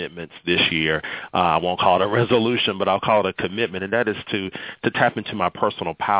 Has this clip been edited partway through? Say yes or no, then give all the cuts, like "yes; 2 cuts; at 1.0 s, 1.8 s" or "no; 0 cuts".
no; 0 cuts